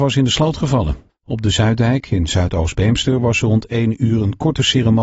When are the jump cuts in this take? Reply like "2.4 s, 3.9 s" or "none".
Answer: 1.1 s